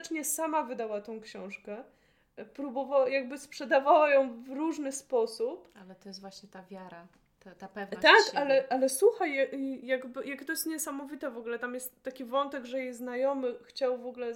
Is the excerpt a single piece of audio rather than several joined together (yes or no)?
yes